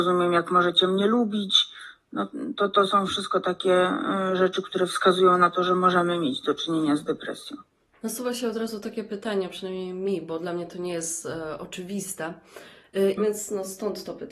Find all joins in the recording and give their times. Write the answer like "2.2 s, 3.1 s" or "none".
7.9 s, 13.2 s